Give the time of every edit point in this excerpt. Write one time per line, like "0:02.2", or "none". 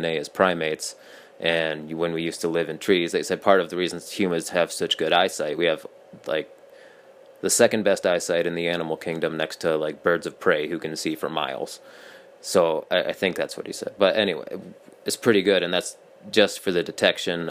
none